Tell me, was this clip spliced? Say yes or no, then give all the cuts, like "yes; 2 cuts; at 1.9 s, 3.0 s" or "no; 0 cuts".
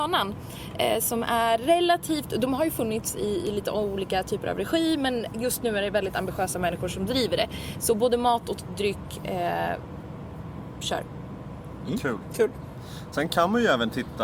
no; 0 cuts